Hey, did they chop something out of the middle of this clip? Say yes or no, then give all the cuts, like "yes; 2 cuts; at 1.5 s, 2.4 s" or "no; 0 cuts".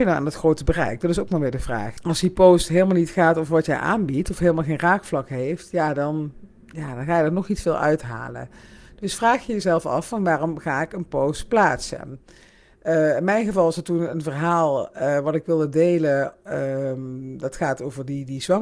yes; 1 cut; at 2.0 s